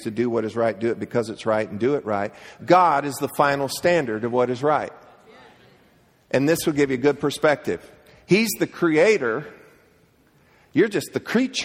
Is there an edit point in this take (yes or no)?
yes